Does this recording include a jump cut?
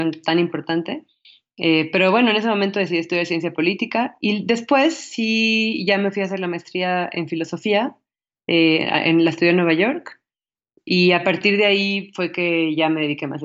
no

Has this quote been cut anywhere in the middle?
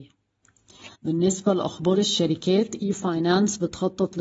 yes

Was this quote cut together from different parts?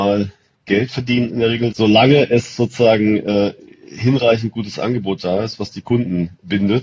yes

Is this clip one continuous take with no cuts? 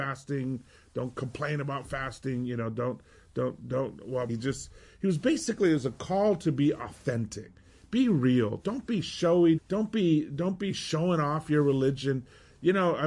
no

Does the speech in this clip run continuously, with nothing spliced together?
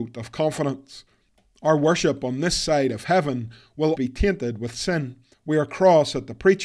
no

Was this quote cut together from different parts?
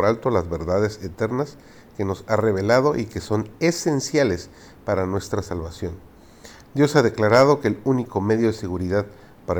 no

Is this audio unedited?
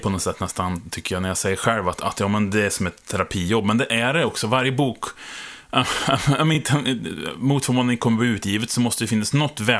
yes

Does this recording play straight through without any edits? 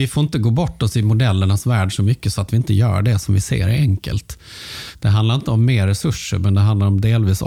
yes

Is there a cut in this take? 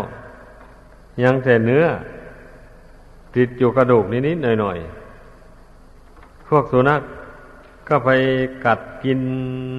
no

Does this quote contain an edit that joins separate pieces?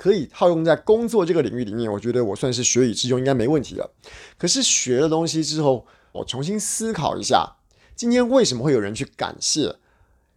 yes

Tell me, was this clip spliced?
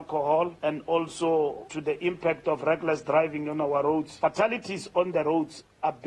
no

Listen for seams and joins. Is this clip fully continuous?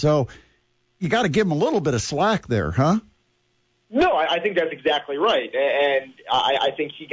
yes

